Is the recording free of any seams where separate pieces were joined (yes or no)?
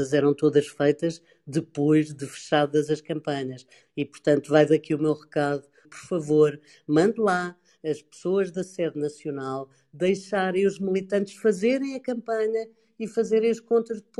no